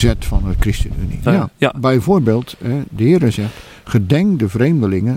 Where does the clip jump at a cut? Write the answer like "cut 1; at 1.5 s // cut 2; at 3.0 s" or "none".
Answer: cut 1; at 1.3 s